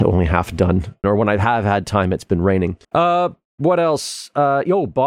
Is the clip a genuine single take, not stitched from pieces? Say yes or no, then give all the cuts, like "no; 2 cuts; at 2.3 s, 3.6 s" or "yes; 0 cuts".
no; 2 cuts; at 1.0 s, 2.8 s